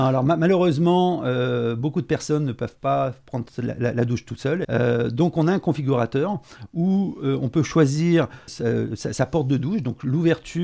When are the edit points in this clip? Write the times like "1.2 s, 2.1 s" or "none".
4.6 s, 8.5 s